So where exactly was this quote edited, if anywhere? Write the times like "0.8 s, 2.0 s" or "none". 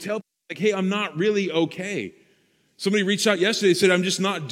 none

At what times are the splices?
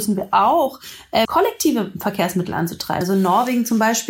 1.3 s, 3.0 s

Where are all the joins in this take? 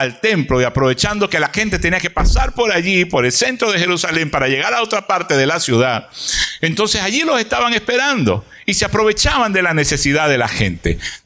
none

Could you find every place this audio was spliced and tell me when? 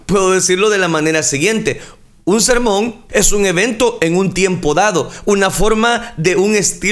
3.1 s

